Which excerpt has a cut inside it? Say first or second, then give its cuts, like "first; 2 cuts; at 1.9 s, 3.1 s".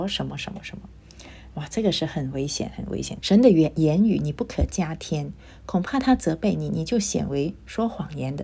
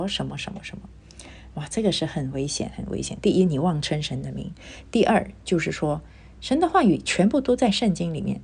first; 1 cut; at 3.2 s